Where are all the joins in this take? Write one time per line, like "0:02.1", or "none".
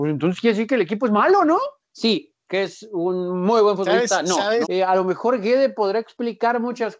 0:01.8
0:04.6